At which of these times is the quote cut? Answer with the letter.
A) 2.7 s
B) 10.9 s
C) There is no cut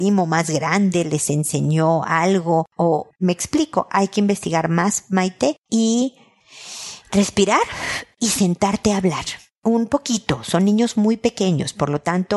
C